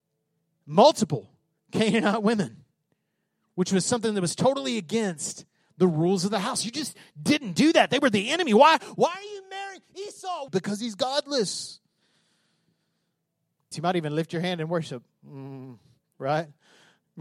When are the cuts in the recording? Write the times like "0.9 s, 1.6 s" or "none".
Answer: 10.5 s, 13.7 s